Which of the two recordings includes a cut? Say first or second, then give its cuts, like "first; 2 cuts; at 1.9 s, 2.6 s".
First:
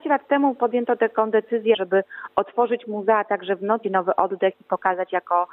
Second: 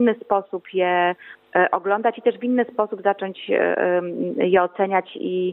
first; 2 cuts; at 1.7 s, 3.8 s